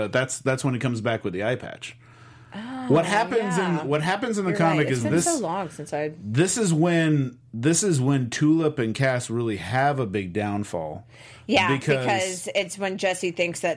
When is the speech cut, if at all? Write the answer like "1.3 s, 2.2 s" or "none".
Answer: none